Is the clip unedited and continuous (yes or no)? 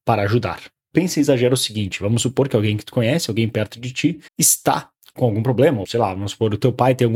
no